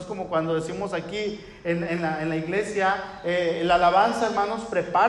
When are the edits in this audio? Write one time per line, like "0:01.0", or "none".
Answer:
none